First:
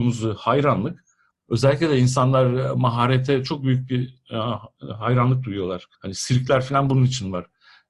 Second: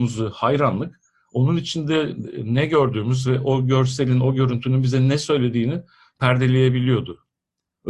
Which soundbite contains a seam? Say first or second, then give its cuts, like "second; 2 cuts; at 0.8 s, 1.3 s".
first; 2 cuts; at 1.3 s, 5.9 s